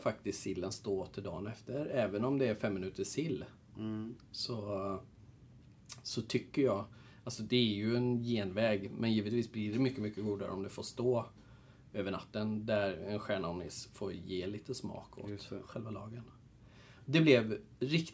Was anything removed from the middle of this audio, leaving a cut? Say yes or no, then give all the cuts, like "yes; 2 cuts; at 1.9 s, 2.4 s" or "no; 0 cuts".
no; 0 cuts